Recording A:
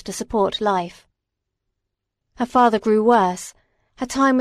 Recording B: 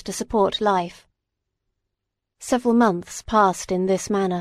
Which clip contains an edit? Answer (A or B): A